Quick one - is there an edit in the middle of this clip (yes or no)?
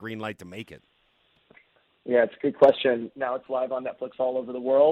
yes